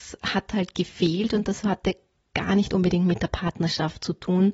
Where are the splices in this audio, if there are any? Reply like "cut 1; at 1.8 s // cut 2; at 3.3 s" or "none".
none